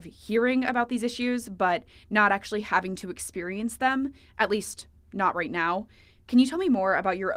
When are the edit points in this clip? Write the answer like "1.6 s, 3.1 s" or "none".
none